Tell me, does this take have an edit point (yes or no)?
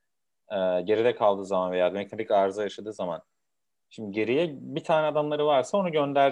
no